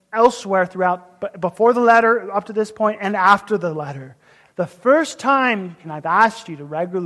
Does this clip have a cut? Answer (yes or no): yes